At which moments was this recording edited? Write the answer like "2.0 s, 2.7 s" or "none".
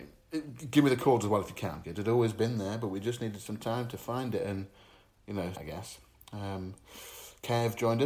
1.8 s, 5.5 s

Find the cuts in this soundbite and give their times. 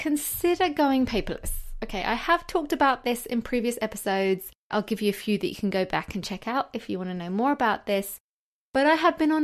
4.7 s

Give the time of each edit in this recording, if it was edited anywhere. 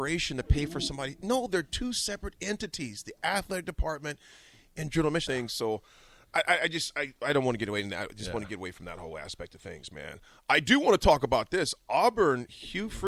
5.3 s

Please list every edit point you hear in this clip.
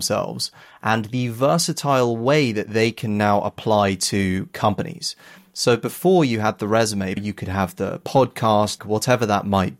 7.2 s, 8.8 s

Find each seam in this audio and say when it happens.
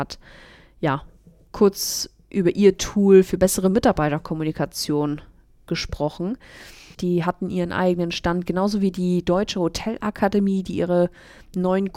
6.9 s

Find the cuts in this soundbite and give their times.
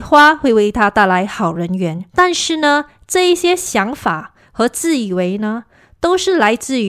2.1 s

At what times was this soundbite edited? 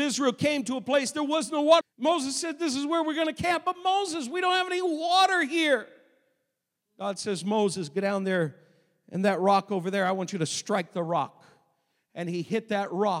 1.8 s

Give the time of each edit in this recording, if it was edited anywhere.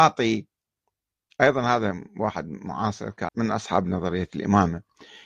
3.3 s

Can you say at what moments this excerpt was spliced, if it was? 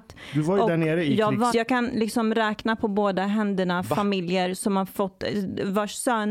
1.5 s

